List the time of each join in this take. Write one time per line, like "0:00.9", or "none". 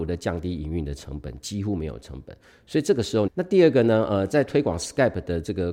0:03.3